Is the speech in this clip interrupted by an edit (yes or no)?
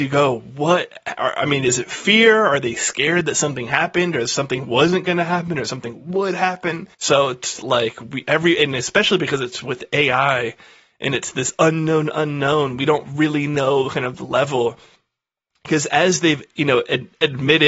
yes